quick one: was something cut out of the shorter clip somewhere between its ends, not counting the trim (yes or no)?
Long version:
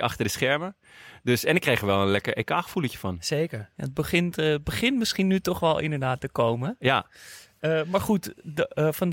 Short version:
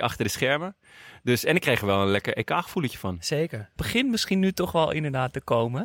yes